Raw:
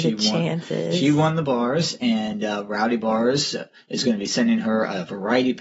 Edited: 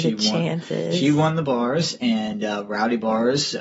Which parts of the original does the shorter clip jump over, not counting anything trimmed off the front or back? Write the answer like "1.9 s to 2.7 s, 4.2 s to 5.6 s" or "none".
none